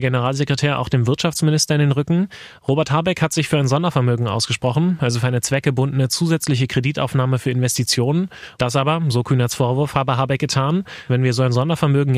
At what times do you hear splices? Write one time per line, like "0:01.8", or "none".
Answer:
0:08.5
0:11.1